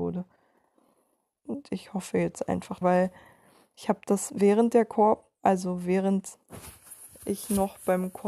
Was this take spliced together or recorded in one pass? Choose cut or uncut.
cut